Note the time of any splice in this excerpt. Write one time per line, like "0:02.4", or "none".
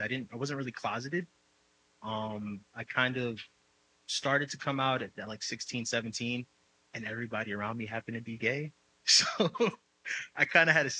none